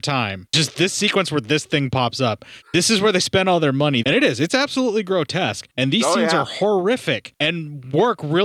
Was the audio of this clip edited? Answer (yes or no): yes